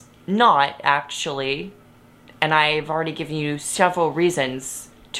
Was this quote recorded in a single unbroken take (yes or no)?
yes